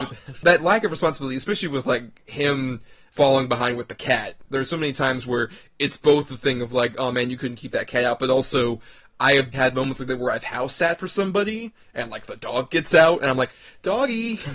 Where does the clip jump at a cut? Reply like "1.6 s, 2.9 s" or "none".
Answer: 9.5 s